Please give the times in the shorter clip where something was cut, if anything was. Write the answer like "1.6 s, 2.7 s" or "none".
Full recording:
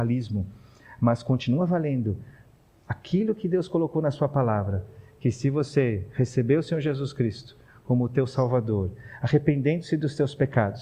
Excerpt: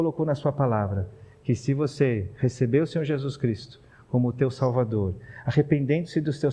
none